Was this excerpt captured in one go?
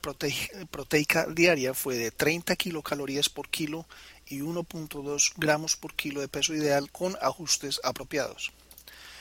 no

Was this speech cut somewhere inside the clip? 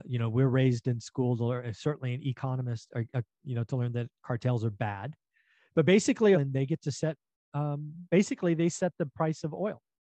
yes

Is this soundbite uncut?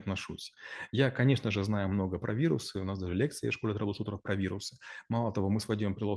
yes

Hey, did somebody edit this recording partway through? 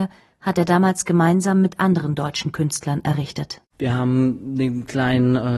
yes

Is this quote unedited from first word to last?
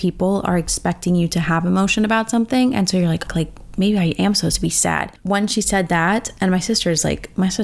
no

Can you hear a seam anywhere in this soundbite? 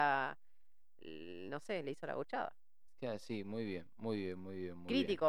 no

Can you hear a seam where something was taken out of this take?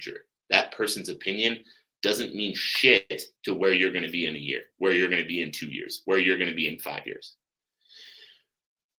yes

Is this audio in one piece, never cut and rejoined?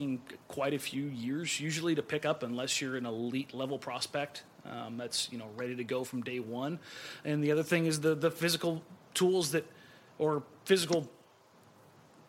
yes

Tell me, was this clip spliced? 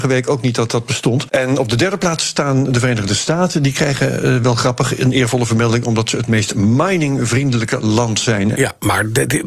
yes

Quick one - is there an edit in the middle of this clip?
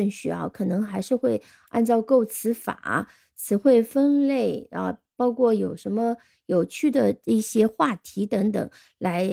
no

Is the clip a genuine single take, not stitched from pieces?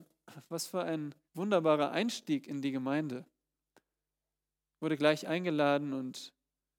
no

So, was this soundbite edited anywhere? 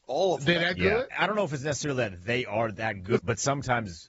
yes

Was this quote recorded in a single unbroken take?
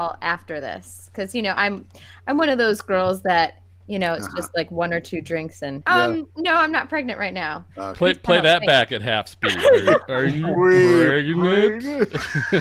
no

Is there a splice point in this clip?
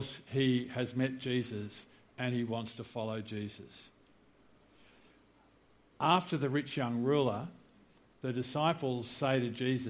no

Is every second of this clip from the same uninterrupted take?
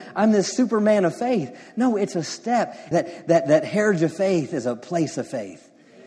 no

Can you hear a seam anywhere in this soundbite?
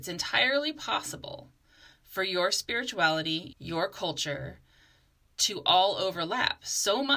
yes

